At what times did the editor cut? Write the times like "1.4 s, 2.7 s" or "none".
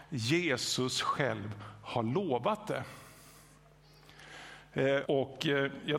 5.0 s